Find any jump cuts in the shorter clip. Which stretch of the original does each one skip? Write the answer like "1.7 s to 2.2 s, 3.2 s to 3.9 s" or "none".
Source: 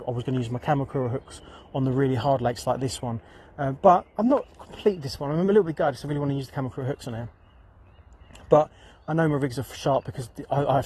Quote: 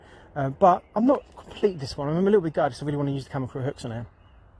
none